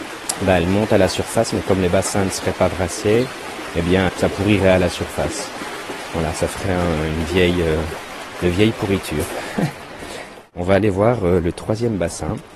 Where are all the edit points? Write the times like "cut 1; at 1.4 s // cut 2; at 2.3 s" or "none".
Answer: none